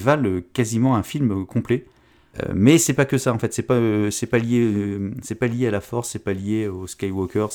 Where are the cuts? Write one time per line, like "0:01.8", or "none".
0:02.3